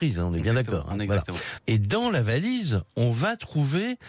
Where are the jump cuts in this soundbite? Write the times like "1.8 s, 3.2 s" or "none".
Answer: 1.6 s